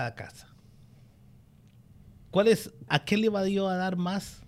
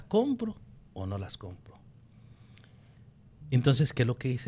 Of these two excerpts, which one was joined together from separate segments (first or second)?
first